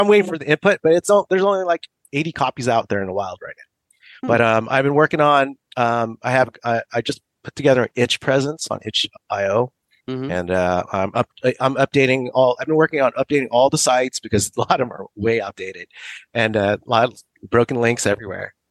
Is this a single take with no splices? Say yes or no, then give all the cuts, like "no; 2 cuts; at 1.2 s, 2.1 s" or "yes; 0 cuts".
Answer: yes; 0 cuts